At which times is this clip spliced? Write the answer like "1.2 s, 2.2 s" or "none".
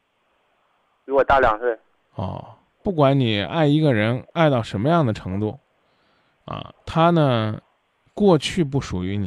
2.8 s, 6.7 s